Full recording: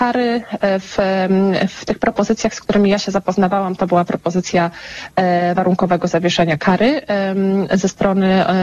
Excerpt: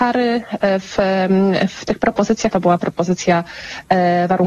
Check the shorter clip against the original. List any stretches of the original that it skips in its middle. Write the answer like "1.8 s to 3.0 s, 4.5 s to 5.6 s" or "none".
2.5 s to 3.8 s